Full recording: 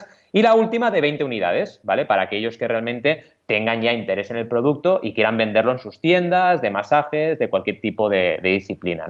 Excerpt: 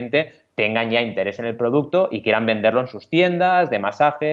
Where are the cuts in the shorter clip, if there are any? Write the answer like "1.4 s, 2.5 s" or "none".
none